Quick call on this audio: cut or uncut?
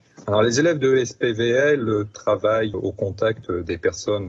cut